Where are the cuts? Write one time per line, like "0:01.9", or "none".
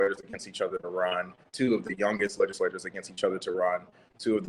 none